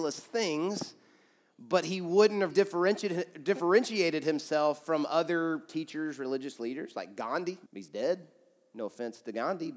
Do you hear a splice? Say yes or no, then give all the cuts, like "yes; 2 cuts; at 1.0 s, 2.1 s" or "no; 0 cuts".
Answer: yes; 2 cuts; at 2.5 s, 7.7 s